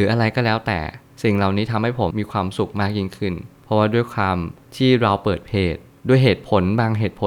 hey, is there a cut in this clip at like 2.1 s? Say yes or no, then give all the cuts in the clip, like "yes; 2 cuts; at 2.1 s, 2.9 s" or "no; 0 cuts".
yes; 1 cut; at 2.1 s